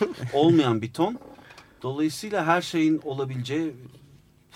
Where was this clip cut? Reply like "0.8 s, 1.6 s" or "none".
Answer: none